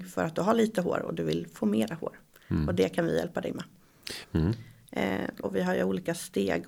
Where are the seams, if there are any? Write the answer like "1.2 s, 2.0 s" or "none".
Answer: 4.2 s, 5.4 s